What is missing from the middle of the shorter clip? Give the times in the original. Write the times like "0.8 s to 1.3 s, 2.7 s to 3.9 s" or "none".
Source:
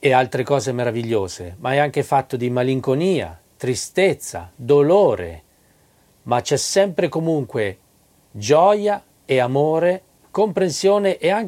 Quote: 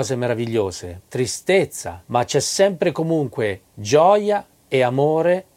1.6 s to 3.5 s, 4.5 s to 6.2 s, 7.8 s to 8.2 s